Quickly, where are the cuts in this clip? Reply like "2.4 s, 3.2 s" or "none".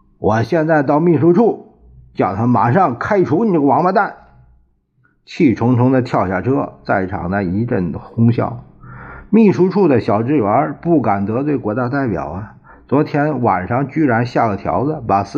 none